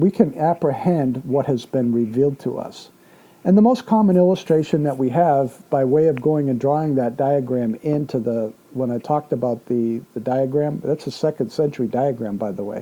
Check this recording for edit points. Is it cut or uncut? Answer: uncut